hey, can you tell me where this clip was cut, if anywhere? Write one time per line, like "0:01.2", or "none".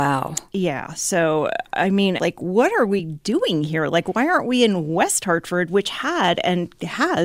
0:02.2

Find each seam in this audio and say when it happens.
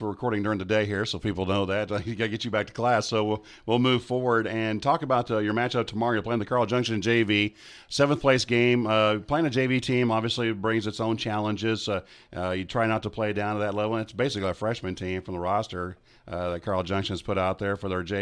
none

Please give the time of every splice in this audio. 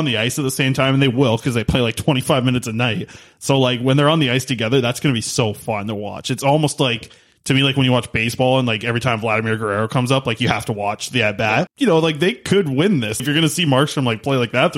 0:11.7
0:13.2

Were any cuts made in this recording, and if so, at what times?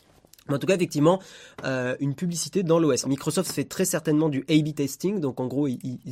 0:02.0
0:03.0

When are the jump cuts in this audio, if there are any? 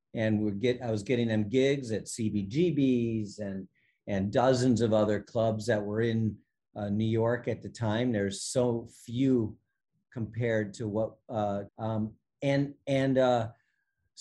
0:11.7

